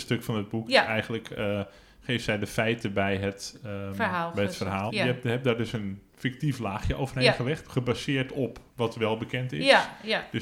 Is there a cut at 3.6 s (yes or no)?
no